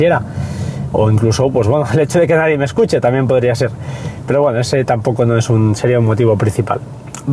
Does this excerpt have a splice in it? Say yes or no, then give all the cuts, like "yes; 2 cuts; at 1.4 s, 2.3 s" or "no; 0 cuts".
no; 0 cuts